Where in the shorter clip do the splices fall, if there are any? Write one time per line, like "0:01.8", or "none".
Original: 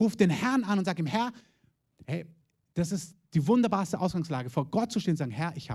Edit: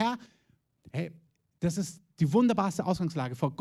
none